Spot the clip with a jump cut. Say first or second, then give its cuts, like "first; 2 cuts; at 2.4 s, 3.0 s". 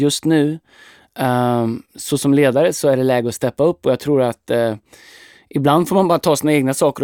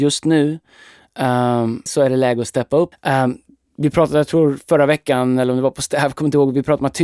second; 2 cuts; at 1.9 s, 2.9 s